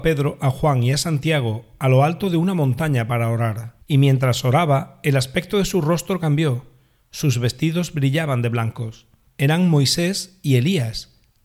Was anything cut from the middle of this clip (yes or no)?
yes